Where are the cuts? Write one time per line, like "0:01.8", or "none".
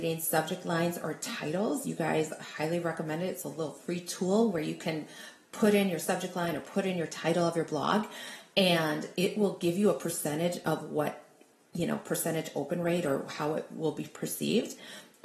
none